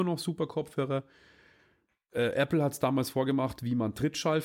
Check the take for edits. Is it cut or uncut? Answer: uncut